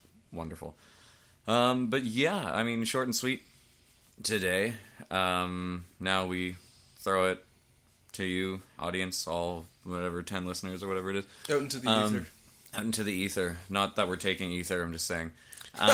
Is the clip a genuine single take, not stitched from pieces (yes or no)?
yes